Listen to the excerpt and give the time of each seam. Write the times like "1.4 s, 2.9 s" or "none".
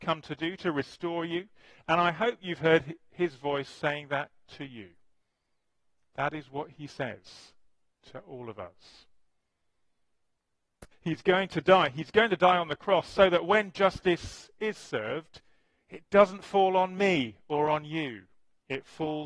10.9 s